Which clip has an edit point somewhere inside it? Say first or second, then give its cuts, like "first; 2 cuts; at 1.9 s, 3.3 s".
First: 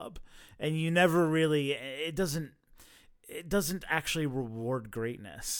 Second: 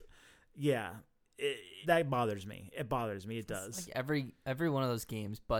second; 1 cut; at 1.8 s